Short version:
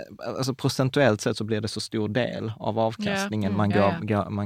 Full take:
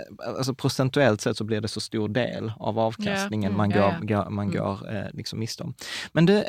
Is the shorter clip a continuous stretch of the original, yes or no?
yes